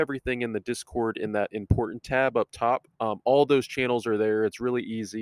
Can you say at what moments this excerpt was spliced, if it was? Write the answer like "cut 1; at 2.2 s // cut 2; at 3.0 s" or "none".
cut 1; at 2.9 s